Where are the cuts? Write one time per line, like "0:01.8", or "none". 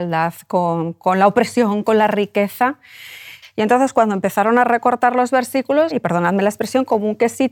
0:03.4
0:05.9